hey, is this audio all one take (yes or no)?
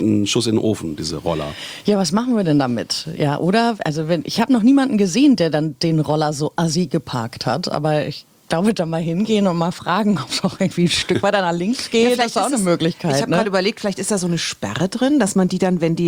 yes